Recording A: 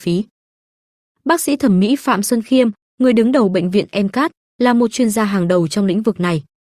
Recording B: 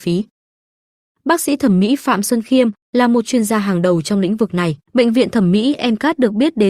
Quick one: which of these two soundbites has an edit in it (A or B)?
B